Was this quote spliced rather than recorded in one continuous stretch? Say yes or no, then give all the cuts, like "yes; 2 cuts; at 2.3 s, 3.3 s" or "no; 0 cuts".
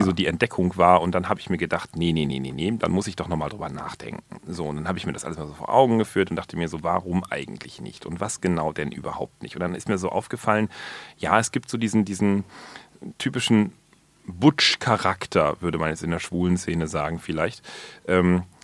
no; 0 cuts